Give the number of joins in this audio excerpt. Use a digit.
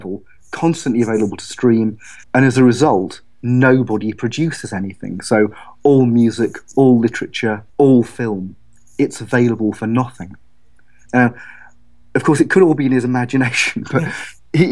3